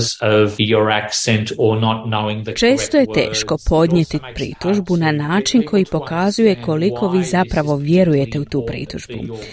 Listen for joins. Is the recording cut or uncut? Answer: uncut